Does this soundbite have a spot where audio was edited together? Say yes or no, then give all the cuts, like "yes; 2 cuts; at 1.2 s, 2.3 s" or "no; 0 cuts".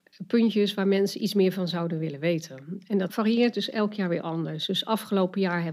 no; 0 cuts